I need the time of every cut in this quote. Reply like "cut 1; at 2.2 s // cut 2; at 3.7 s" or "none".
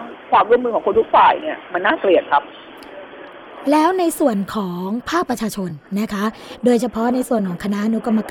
none